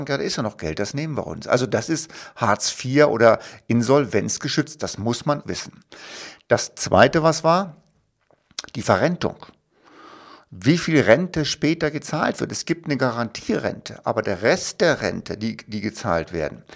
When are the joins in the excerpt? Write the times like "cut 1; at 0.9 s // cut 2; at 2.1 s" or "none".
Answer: cut 1; at 5.4 s